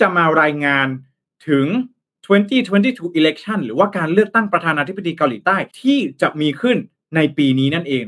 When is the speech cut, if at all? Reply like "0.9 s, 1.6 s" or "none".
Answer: 5.7 s